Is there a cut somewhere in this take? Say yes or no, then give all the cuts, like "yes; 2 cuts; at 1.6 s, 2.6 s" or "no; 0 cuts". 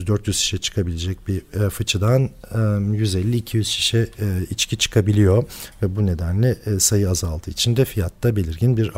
no; 0 cuts